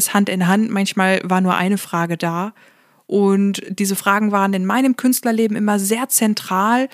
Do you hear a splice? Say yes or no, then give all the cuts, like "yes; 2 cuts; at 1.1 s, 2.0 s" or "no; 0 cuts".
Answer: no; 0 cuts